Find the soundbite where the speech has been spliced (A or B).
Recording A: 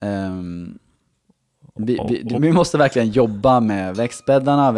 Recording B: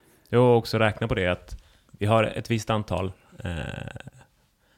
A